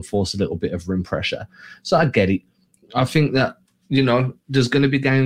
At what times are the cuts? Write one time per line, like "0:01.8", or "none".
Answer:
none